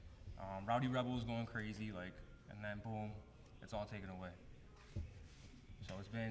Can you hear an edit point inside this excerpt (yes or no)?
no